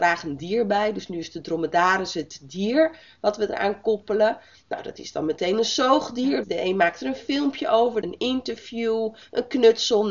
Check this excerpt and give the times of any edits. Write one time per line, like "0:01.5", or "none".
0:06.4
0:08.0